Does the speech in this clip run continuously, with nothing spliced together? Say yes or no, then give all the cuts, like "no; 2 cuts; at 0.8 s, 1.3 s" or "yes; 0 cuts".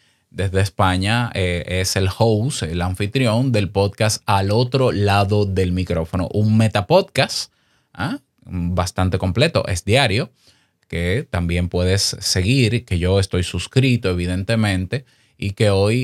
yes; 0 cuts